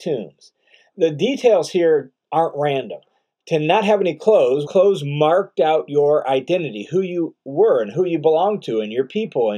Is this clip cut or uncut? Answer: cut